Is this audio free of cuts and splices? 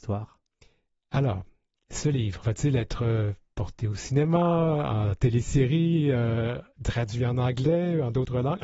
no; 1 cut; at 2.4 s

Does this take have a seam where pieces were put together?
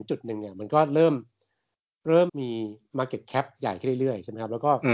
yes; 1 cut; at 2.3 s

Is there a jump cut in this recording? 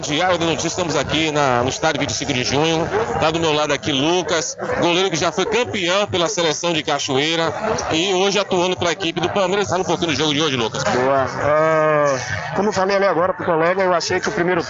yes; 2 cuts; at 9.6 s, 10.8 s

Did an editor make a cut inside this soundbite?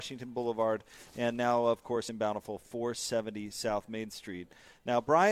no; 0 cuts

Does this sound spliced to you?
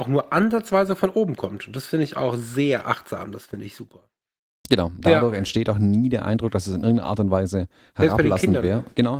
yes; 1 cut; at 5.0 s

